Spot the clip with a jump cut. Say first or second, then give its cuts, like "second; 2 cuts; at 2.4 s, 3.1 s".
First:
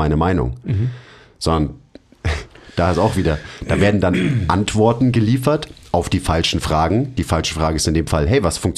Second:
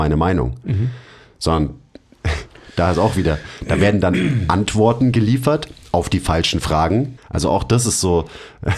second; 1 cut; at 7.2 s